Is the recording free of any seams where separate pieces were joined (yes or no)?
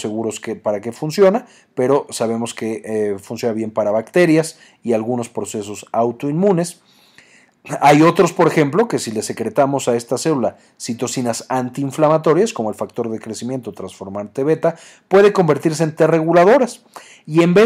yes